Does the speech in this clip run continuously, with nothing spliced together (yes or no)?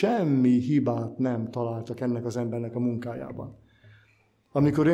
yes